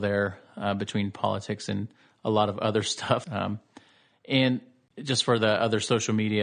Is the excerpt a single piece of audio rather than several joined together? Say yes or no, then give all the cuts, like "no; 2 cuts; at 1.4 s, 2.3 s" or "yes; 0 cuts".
no; 1 cut; at 3.2 s